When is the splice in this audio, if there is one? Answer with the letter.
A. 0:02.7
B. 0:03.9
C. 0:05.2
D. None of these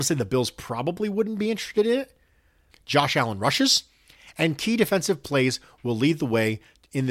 A